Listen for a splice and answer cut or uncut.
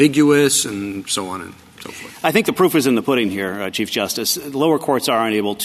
uncut